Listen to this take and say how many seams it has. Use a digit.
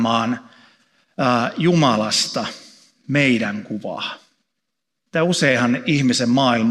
1